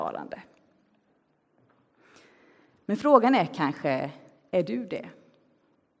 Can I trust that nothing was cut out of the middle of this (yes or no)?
yes